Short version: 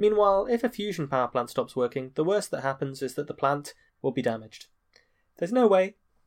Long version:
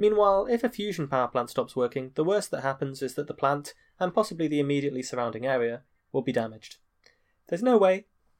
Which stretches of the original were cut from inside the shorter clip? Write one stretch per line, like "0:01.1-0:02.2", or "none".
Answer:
0:03.9-0:06.0

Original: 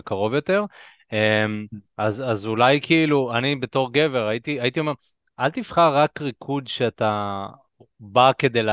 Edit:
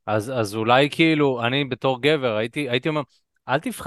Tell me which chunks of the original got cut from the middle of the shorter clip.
none

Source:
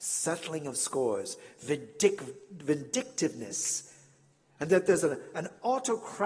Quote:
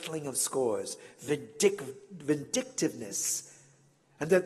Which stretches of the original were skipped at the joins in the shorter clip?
none

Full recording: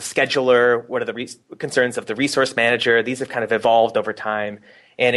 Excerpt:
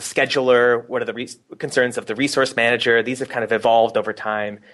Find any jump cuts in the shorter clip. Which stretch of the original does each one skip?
none

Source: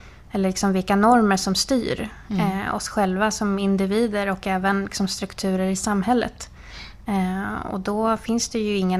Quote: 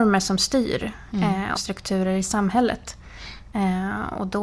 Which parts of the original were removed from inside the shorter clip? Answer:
0:02.7-0:05.1

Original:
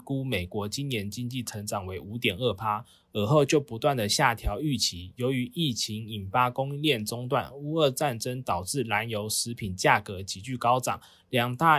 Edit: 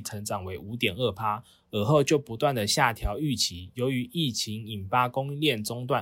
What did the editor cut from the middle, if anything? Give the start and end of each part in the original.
none

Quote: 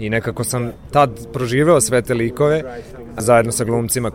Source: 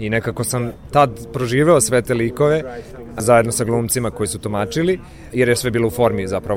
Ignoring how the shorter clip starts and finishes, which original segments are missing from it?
none

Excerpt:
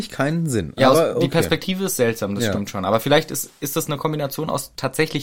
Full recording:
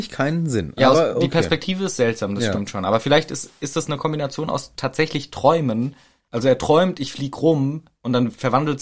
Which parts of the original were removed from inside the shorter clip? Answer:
none

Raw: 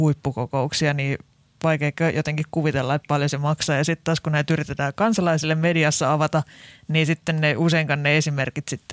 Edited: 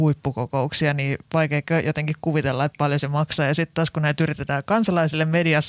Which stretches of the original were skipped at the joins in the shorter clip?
0:01.2-0:01.5

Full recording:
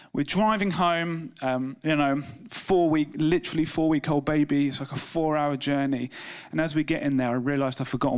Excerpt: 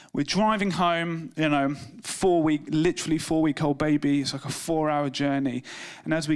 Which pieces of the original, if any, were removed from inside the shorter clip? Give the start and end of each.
0:01.3-0:01.8

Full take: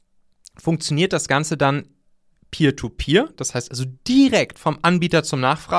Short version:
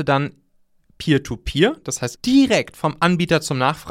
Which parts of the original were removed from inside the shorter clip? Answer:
0:03.7-0:04.0

